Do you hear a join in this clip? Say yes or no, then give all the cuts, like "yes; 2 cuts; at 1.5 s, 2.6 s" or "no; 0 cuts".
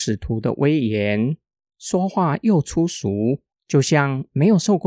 yes; 1 cut; at 3.5 s